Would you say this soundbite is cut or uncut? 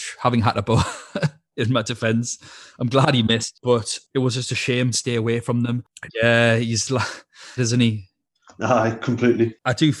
cut